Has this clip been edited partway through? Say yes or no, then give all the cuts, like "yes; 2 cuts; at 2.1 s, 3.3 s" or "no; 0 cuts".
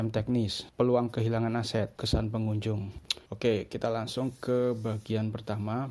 yes; 1 cut; at 2.0 s